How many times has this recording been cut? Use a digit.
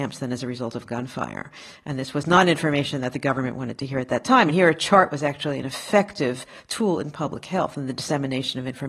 0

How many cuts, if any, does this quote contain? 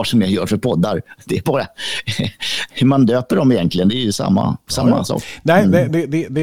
0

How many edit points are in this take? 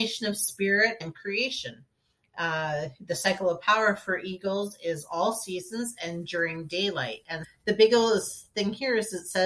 2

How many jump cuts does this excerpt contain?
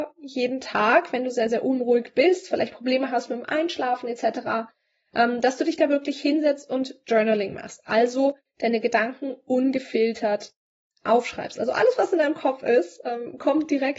0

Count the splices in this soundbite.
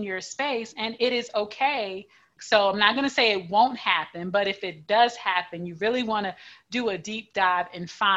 1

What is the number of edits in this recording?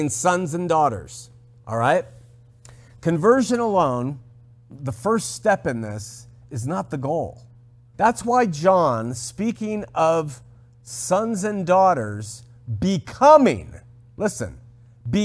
1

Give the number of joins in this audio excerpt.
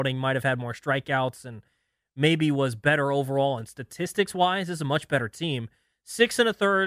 0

